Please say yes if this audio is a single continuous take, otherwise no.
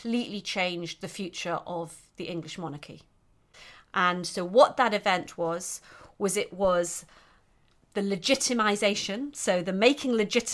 yes